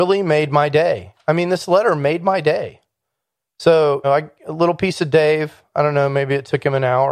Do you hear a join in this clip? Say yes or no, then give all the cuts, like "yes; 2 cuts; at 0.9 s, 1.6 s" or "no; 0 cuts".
yes; 1 cut; at 4.0 s